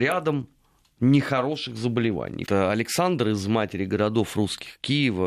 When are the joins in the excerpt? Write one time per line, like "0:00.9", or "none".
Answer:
0:02.5